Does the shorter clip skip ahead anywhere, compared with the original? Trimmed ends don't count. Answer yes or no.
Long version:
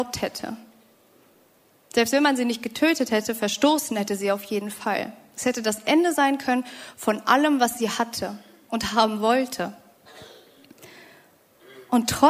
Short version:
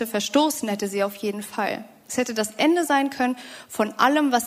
no